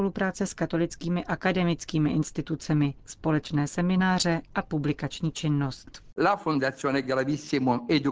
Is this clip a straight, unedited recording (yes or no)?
yes